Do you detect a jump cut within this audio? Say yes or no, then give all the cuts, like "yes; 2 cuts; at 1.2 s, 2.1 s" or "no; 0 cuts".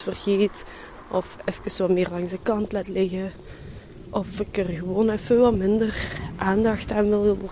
no; 0 cuts